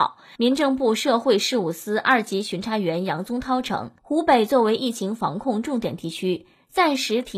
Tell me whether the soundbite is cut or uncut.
cut